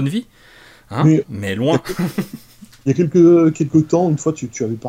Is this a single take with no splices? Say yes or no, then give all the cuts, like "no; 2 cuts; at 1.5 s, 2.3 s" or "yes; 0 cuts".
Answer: yes; 0 cuts